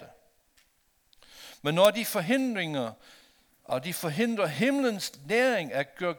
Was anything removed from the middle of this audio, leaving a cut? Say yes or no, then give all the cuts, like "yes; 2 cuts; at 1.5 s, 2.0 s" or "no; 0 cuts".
yes; 1 cut; at 1.6 s